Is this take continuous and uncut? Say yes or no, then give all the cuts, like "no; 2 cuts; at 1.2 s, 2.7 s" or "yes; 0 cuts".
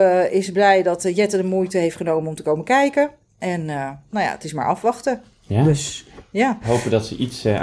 yes; 0 cuts